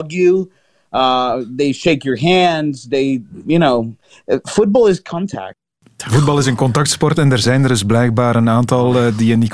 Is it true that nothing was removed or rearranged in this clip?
yes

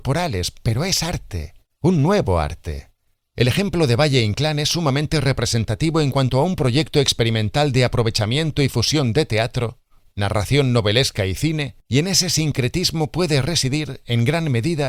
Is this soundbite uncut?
no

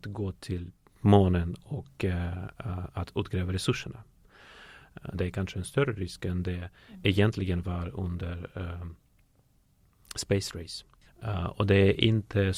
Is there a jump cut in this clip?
yes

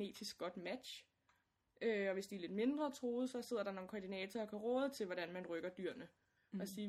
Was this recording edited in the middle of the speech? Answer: no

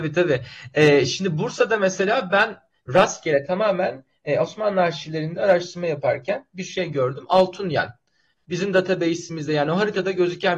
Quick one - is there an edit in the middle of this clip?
no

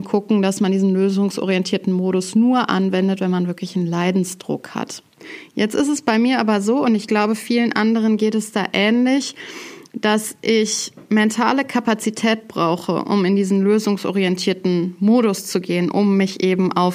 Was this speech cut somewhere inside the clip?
no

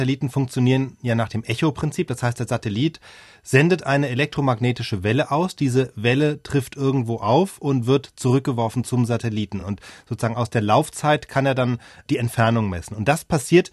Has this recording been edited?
no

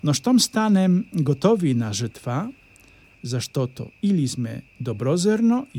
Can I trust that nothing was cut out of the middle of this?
no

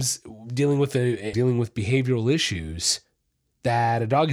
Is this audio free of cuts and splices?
no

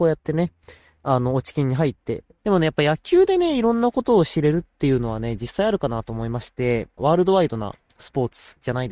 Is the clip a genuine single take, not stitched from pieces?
no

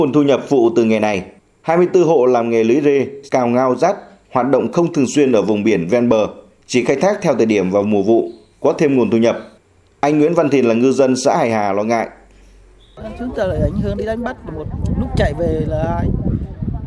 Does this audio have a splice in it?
yes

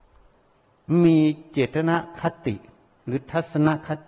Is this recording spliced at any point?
no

